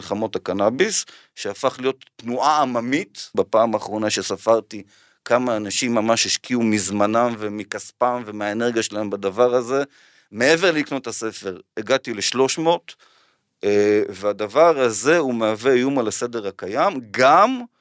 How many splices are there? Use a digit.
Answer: 1